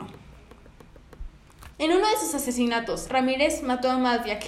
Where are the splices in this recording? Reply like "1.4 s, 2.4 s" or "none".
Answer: 1.7 s, 3.1 s